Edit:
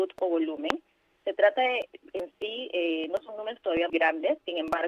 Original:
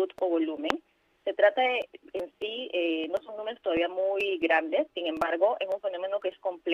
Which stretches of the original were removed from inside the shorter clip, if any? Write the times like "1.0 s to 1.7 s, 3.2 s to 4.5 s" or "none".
3.9 s to 4.4 s

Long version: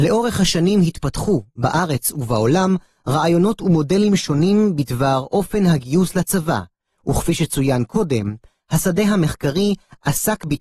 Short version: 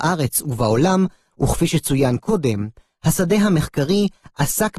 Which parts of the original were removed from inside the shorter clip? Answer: 3.0 s to 7.0 s

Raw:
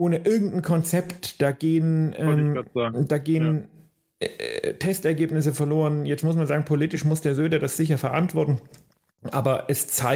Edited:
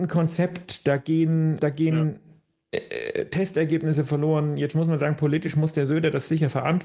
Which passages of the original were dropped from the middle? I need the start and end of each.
2.1 s to 3.1 s

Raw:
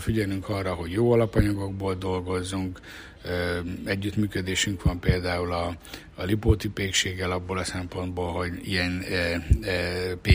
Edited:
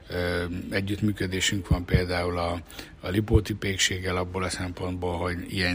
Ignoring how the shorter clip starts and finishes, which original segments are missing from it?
none

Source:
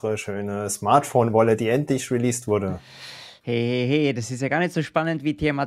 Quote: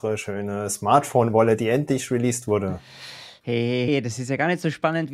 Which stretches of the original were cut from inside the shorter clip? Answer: 3.9 s to 4.0 s

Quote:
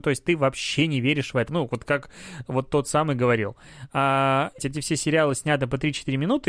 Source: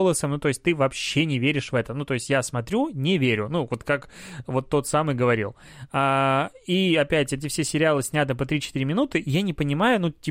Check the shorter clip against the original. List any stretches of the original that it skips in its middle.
1.9 s to 3.5 s, 6.6 s to 7.3 s

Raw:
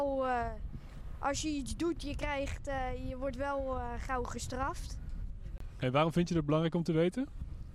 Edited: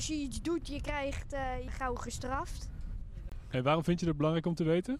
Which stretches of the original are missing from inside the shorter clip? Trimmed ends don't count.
3.0 s to 4.0 s

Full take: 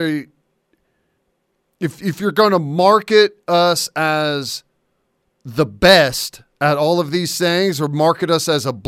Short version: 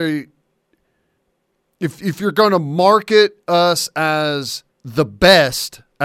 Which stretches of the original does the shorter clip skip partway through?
4.7 s to 5.3 s

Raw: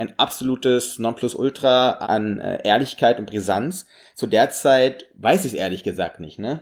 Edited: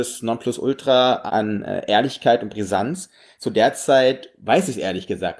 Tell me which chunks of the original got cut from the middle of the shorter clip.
none

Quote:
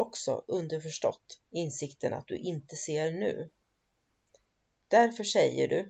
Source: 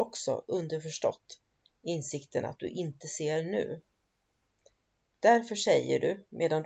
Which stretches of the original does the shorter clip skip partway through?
1.4 s to 1.8 s

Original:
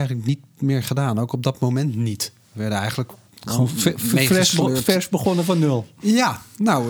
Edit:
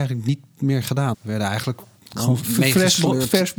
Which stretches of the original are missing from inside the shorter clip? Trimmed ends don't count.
1.1 s to 2.4 s, 3.7 s to 4.0 s

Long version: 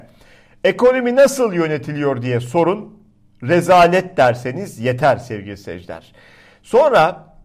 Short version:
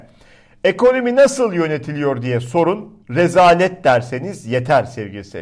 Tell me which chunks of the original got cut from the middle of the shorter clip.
3.0 s to 3.3 s

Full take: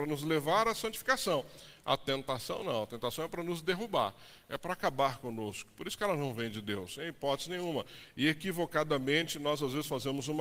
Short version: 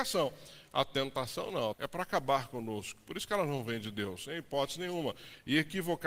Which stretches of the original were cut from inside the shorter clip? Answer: 2.9 s to 4.4 s

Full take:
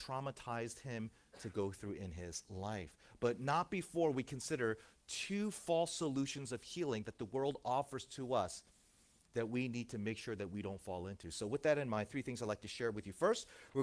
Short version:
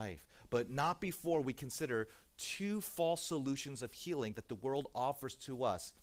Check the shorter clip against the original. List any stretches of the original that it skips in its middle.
none

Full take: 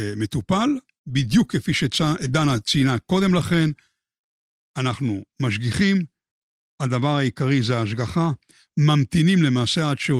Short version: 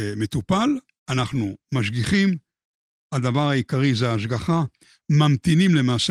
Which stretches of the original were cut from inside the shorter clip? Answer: 1.0 s to 4.7 s

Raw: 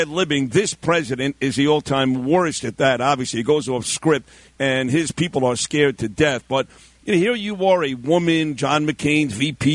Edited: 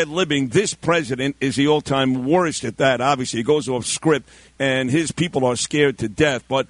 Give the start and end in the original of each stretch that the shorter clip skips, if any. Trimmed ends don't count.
none

